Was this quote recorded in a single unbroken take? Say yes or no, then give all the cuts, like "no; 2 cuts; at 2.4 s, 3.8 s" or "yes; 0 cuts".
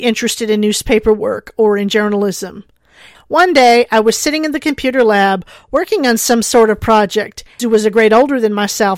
no; 2 cuts; at 3.1 s, 7.6 s